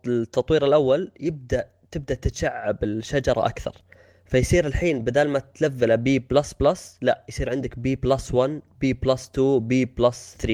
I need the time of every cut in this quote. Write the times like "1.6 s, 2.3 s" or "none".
none